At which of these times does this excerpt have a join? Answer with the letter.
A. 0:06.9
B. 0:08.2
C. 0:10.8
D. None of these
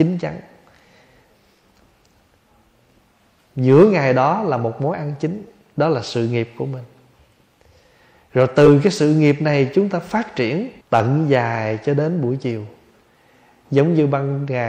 C